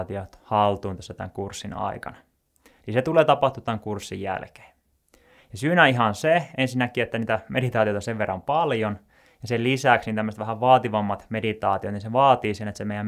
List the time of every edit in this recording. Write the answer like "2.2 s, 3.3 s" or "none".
none